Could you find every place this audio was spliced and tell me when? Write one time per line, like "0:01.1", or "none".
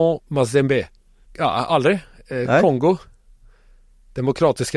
0:01.2